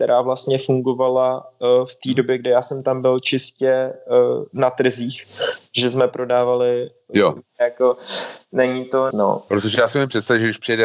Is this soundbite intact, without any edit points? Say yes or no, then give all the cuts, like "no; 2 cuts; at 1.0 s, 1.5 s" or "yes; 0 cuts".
no; 2 cuts; at 7.4 s, 9.1 s